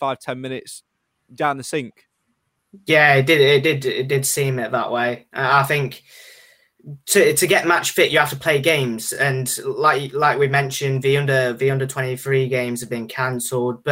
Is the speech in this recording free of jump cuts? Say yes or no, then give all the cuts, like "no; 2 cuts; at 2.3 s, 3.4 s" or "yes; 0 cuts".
yes; 0 cuts